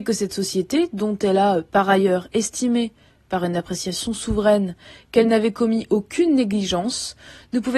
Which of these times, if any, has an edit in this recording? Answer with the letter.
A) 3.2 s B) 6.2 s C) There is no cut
C